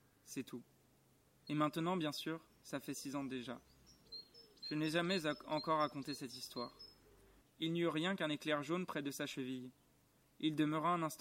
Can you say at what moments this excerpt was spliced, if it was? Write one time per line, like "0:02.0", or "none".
0:01.5
0:07.4